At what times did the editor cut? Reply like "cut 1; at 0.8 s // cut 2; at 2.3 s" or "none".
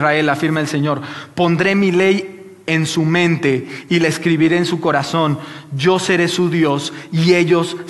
none